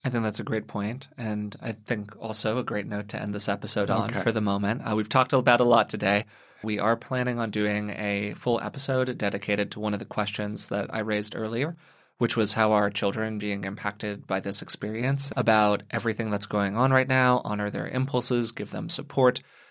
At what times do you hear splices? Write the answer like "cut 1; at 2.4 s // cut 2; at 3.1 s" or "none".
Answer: cut 1; at 6.6 s // cut 2; at 15.3 s